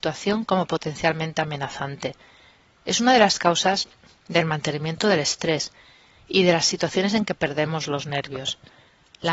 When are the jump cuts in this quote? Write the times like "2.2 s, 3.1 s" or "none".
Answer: none